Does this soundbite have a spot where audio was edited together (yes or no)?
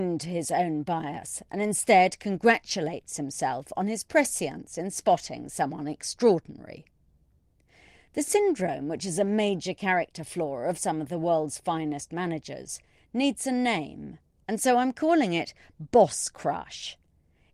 no